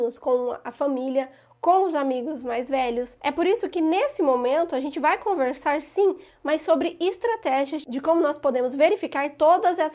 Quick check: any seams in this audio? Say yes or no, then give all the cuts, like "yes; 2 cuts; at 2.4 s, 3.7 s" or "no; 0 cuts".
yes; 1 cut; at 3.2 s